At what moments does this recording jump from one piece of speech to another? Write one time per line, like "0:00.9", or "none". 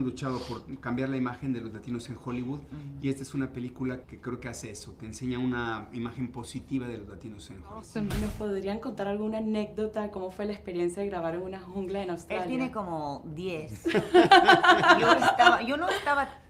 0:04.0